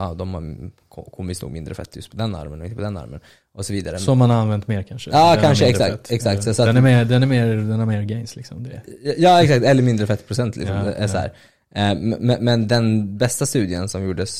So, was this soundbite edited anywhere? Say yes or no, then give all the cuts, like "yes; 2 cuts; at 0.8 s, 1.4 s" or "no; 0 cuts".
no; 0 cuts